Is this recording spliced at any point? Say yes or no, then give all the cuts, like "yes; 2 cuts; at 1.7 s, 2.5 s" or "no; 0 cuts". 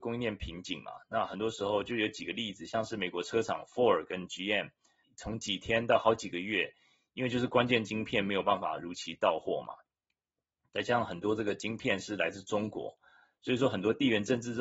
yes; 1 cut; at 5.0 s